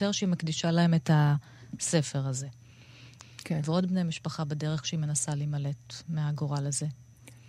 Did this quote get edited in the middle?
yes; 1 cut; at 3.2 s

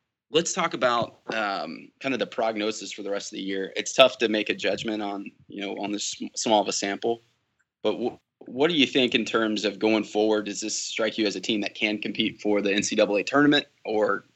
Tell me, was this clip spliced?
no; 0 cuts

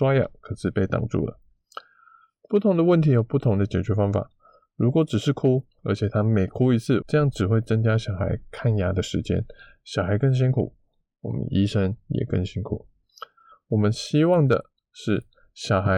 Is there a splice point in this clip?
yes; 3 cuts; at 5.8 s, 7.0 s, 13.5 s

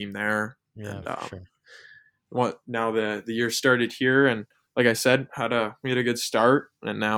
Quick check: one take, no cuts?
yes; 0 cuts

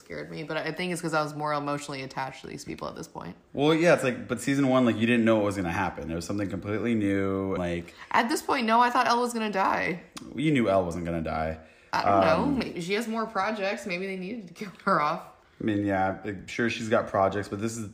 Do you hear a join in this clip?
yes; 1 cut; at 7.6 s

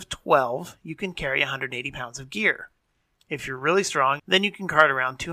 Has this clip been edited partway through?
yes; 1 cut; at 4.2 s

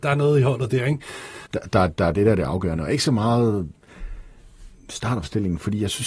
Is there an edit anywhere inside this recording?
yes; 1 cut; at 1.5 s

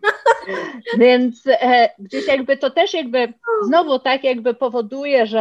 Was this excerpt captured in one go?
yes; 0 cuts

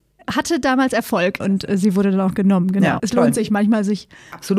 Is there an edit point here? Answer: yes; 1 cut; at 3.0 s

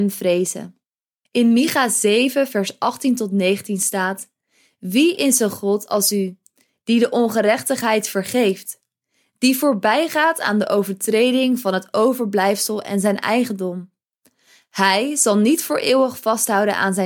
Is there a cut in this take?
no; 0 cuts

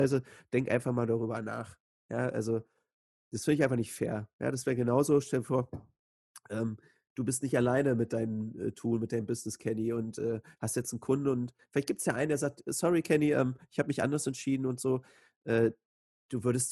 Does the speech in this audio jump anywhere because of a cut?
no; 0 cuts

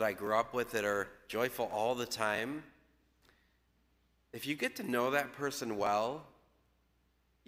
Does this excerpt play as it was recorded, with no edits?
yes; 0 cuts

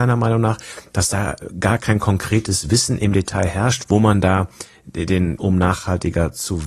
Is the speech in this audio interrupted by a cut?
yes; 2 cuts; at 3.8 s, 5.4 s

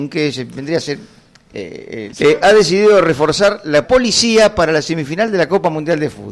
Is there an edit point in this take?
yes; 2 cuts; at 2.1 s, 3.8 s

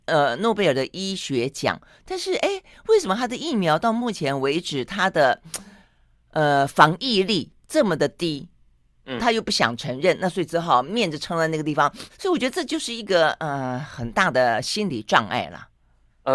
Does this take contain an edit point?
yes; 2 cuts; at 9.2 s, 12.1 s

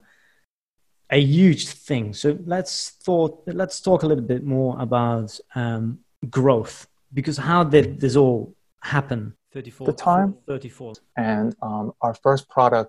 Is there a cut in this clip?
yes; 2 cuts; at 9.4 s, 11.1 s

